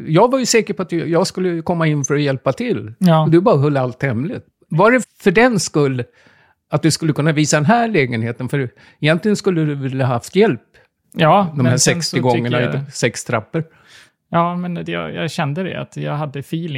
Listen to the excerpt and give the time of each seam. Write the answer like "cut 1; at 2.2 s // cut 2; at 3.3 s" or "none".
cut 1; at 5.0 s